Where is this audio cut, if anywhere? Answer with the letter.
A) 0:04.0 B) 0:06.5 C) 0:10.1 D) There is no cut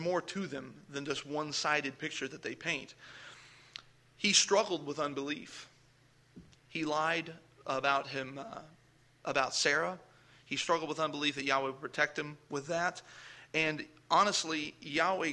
B